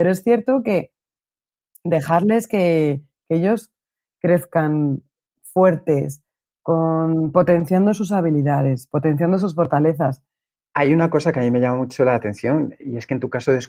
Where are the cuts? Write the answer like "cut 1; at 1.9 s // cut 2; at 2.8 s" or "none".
cut 1; at 10.6 s // cut 2; at 12.8 s